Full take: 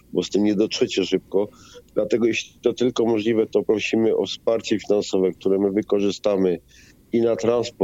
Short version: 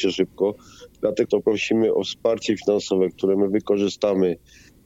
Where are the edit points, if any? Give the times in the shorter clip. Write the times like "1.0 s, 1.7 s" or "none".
1.2 s